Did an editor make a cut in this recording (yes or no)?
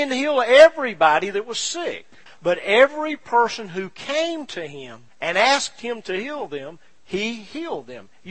yes